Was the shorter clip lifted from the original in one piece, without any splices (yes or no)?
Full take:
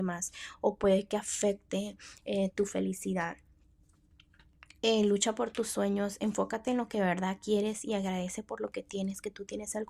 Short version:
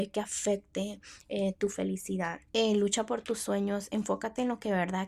no